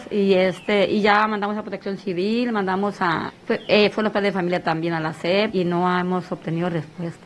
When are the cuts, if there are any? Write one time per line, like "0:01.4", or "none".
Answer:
0:03.3
0:05.5